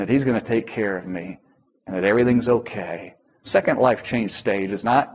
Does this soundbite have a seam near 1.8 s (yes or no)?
no